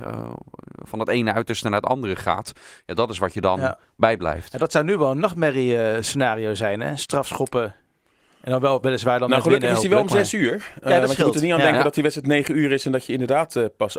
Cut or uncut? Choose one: uncut